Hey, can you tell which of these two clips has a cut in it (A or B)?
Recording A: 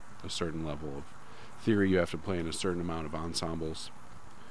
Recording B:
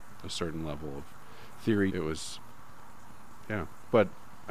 B